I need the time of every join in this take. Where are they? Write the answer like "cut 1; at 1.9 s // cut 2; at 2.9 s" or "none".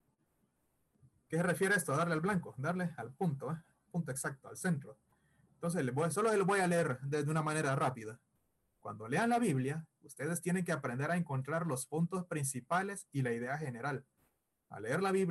none